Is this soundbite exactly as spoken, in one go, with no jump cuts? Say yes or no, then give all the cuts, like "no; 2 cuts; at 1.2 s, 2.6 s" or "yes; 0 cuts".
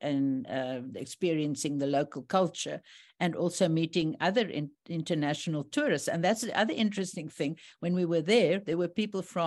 yes; 0 cuts